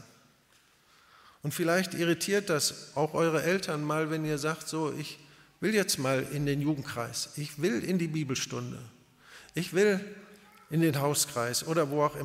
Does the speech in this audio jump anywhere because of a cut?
no; 0 cuts

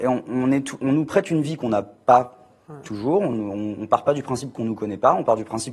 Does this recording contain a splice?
no; 0 cuts

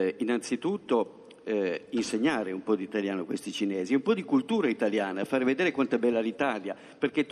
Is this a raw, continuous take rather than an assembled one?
yes; 0 cuts

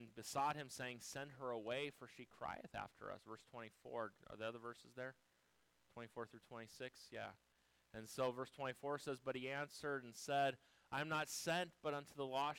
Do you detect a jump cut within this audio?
no; 0 cuts

